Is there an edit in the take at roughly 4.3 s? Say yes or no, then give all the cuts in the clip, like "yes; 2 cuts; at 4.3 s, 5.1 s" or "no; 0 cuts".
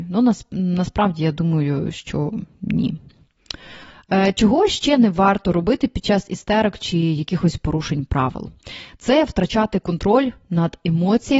no; 0 cuts